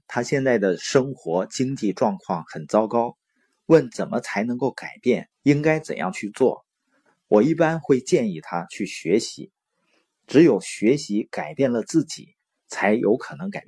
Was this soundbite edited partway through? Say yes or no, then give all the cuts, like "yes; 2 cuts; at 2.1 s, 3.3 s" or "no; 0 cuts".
yes; 1 cut; at 5.3 s